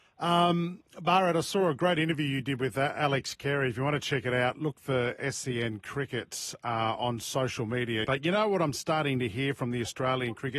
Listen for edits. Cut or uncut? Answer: cut